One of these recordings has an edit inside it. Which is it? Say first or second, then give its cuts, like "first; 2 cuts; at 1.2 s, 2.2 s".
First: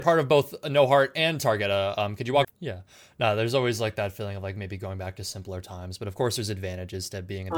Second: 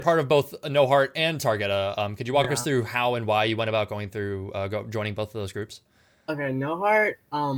first; 1 cut; at 2.4 s